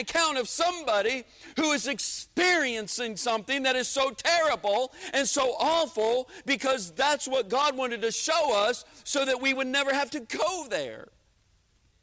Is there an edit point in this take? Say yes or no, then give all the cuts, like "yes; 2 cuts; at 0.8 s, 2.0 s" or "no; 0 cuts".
no; 0 cuts